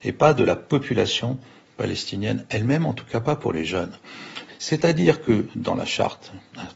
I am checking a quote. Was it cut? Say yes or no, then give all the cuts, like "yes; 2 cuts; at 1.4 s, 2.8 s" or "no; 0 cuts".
yes; 1 cut; at 4.5 s